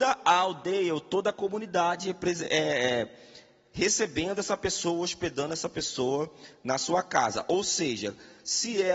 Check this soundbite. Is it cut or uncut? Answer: uncut